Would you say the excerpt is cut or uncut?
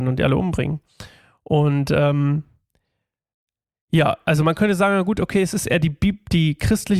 uncut